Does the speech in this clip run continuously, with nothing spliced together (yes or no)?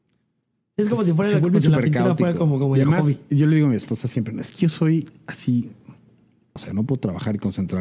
no